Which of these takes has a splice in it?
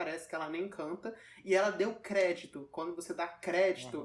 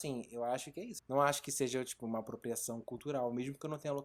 second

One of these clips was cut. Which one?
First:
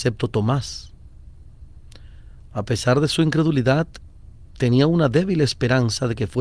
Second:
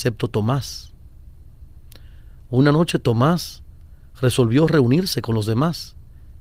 first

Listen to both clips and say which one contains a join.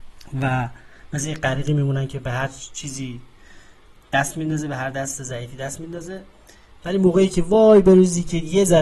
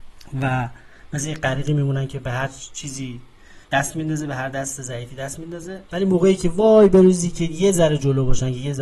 second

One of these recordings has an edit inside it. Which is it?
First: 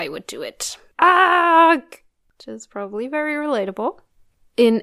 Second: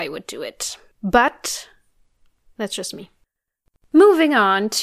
first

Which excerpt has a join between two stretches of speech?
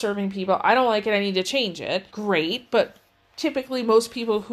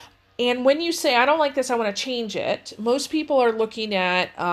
first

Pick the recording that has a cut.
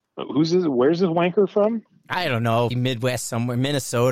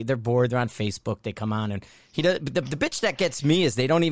first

